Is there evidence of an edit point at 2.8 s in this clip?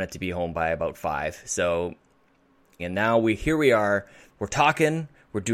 yes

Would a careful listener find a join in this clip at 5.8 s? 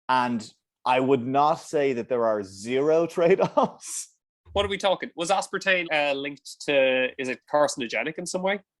yes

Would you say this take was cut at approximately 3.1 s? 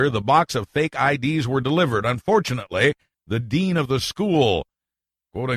yes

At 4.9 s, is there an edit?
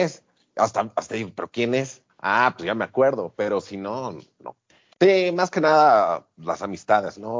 yes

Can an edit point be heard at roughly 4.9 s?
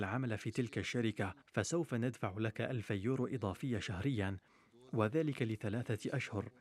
no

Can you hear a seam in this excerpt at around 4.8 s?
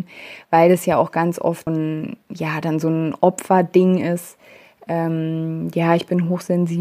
no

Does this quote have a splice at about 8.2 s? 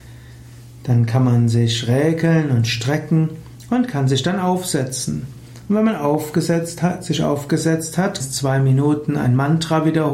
yes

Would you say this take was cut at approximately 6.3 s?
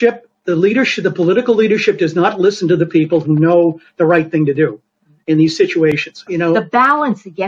yes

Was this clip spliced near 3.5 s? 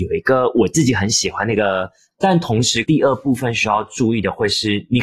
no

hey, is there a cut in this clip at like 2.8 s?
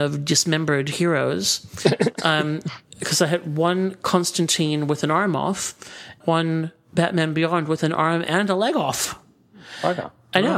no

